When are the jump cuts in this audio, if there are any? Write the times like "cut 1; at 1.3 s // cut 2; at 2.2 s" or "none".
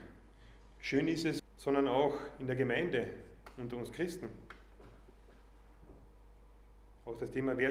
cut 1; at 1.4 s